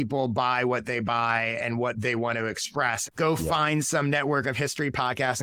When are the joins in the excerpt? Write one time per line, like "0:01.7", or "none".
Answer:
0:03.1